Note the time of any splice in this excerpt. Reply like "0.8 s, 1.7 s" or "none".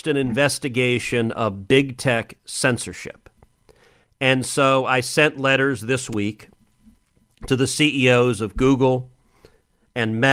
none